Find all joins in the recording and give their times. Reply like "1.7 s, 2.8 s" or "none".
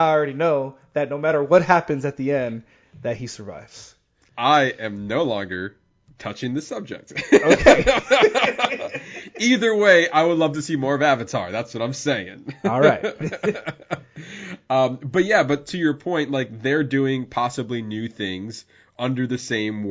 none